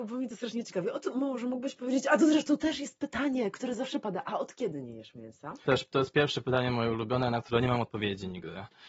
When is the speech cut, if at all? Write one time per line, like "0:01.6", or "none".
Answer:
0:05.7